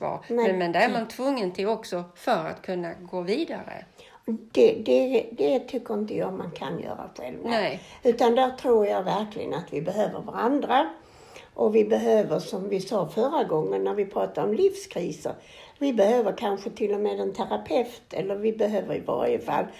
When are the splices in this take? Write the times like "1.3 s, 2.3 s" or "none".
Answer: none